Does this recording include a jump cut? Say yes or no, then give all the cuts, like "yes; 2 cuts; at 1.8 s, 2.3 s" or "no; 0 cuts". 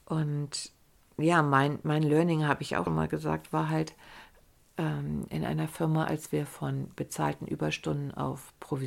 yes; 1 cut; at 2.9 s